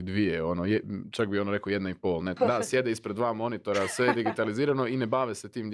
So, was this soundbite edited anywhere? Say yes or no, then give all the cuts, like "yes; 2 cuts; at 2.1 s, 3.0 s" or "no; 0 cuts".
yes; 1 cut; at 2.4 s